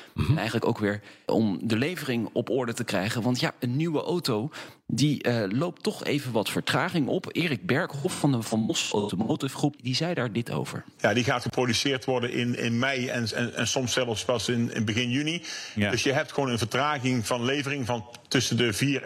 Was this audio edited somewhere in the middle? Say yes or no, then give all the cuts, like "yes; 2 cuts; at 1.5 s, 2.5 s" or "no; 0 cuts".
yes; 2 cuts; at 9.8 s, 11.0 s